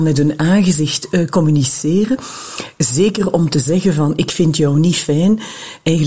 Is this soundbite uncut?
yes; 0 cuts

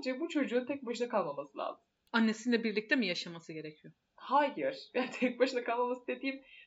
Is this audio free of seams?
yes; 0 cuts

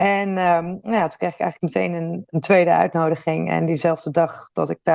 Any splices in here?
no; 0 cuts

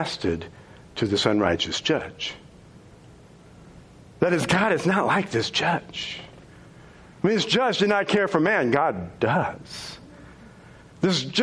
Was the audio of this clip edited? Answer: no; 0 cuts

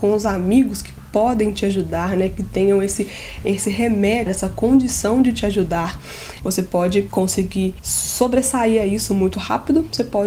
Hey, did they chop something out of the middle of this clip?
yes; 2 cuts; at 4.3 s, 6.4 s

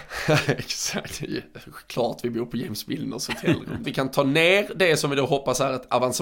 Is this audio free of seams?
no; 1 cut; at 3.8 s

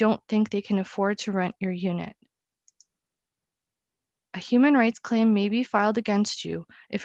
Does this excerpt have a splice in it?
yes; 1 cut; at 4.2 s

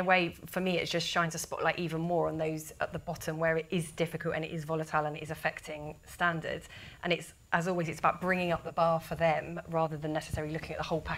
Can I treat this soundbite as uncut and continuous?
yes; 0 cuts

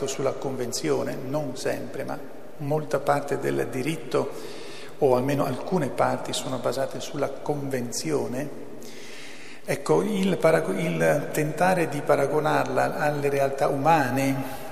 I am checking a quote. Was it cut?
no; 0 cuts

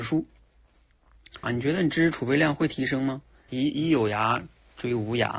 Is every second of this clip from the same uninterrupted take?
no; 2 cuts; at 1.4 s, 3.5 s

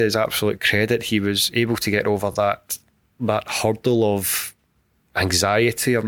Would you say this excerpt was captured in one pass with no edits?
yes; 0 cuts

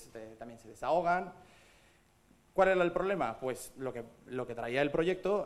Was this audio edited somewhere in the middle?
no; 0 cuts

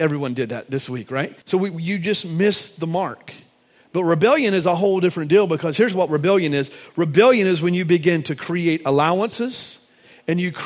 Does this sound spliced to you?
yes; 1 cut; at 1.4 s

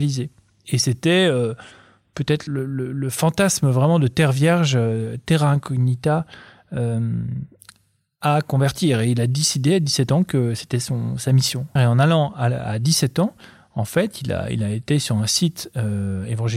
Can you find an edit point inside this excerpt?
yes; 1 cut; at 11.8 s

